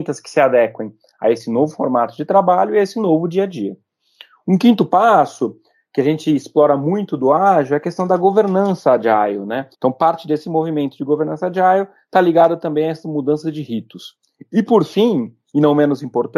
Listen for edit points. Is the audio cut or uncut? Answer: cut